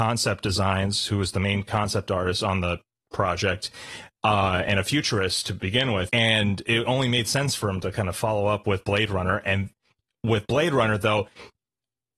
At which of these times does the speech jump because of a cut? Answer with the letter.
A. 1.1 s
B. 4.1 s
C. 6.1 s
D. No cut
C